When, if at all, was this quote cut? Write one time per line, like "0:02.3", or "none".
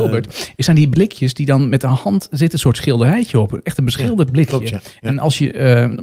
none